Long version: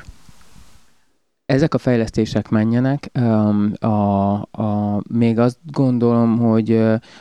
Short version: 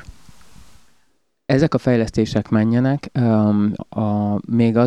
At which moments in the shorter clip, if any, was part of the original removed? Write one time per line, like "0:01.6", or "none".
0:03.8